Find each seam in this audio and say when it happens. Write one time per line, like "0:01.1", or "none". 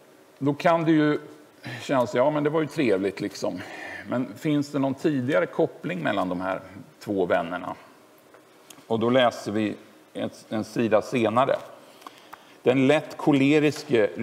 0:12.5